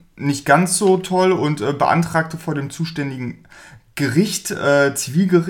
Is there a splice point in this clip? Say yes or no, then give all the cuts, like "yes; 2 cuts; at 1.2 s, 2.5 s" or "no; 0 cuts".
no; 0 cuts